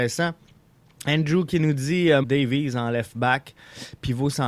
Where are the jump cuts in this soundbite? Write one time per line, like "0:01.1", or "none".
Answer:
0:02.2